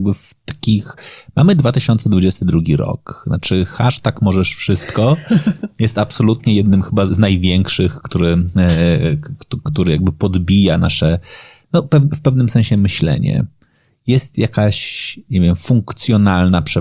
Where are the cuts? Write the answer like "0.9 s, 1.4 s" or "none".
7.1 s